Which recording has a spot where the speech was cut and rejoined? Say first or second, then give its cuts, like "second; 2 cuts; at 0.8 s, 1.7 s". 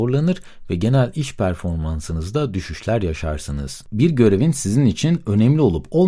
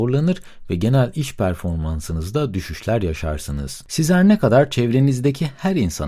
first; 1 cut; at 3.9 s